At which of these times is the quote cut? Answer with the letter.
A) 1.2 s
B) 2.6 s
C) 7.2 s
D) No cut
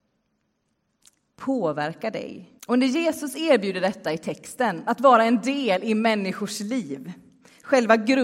B